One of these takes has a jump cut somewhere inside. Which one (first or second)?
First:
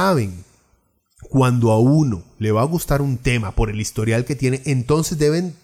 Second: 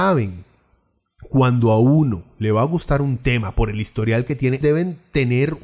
second